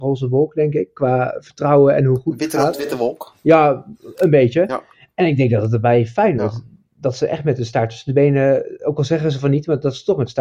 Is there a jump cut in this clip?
no; 0 cuts

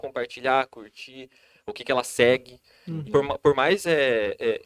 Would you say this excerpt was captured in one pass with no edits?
no; 1 cut; at 3.1 s

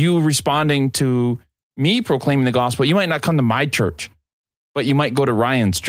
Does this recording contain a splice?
no; 0 cuts

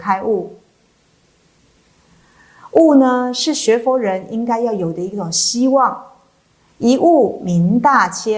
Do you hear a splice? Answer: yes; 1 cut; at 6.7 s

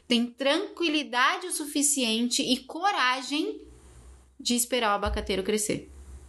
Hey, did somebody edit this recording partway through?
no; 0 cuts

